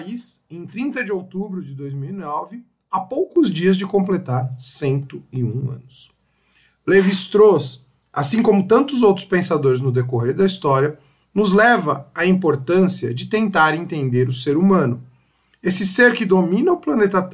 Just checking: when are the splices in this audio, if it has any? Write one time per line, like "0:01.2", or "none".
none